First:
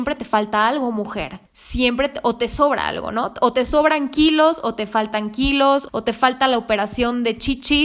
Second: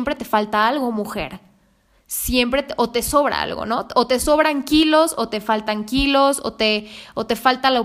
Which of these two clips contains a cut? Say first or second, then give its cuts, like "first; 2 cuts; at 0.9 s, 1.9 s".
first; 2 cuts; at 1.5 s, 5.9 s